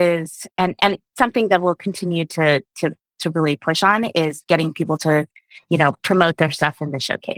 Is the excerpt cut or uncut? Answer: uncut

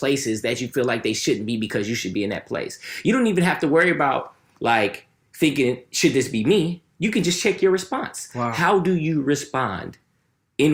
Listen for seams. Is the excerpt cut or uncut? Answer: uncut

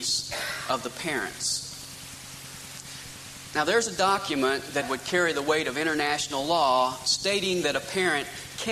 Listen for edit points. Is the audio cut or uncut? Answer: cut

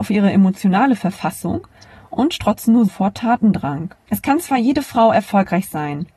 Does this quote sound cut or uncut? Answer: cut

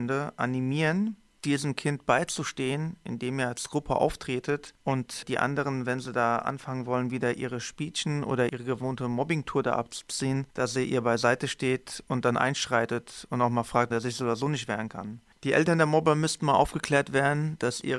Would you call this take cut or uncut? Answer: cut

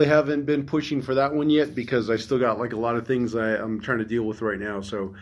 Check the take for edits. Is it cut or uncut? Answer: uncut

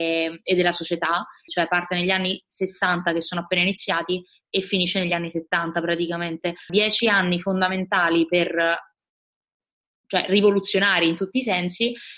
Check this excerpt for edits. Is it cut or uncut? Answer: cut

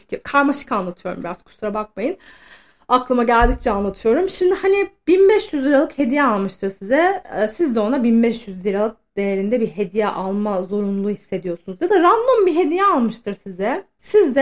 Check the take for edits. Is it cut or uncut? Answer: uncut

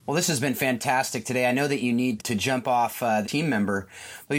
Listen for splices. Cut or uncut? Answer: cut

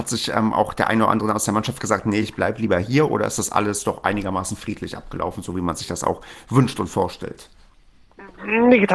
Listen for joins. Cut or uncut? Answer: uncut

